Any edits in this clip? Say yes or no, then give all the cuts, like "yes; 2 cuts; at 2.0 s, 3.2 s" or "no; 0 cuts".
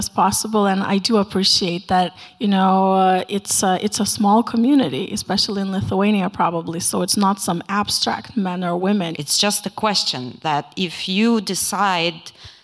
yes; 1 cut; at 9.1 s